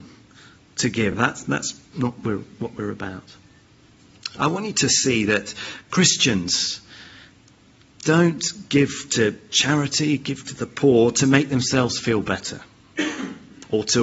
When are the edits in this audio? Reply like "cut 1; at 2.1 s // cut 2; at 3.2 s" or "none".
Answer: none

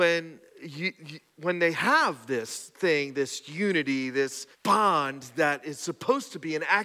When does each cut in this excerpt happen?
cut 1; at 4.5 s

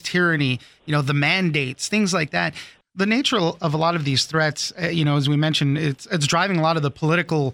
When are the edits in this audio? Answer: cut 1; at 2.8 s

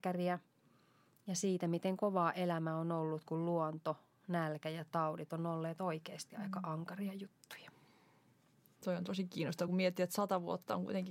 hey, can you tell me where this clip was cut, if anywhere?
none

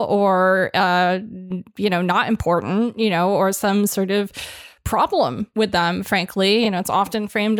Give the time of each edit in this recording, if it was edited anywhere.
none

